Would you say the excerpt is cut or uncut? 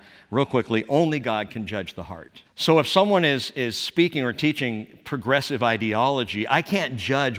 cut